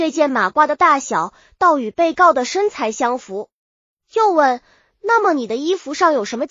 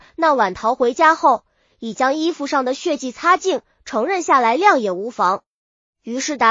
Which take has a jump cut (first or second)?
first